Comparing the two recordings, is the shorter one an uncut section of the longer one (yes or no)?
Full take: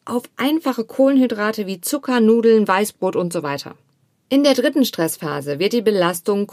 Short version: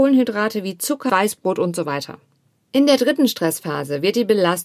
no